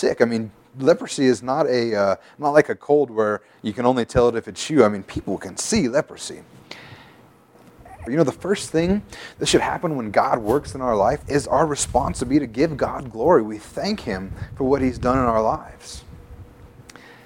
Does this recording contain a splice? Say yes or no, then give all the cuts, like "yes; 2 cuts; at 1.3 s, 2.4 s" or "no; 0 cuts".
yes; 2 cuts; at 8.1 s, 11.2 s